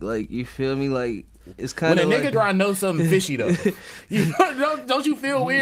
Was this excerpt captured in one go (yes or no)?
no